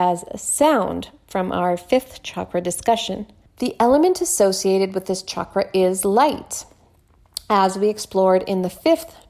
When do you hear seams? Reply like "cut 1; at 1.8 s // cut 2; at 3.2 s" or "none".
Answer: cut 1; at 3.5 s